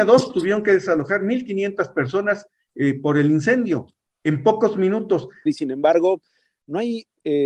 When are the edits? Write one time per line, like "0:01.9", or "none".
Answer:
0:05.5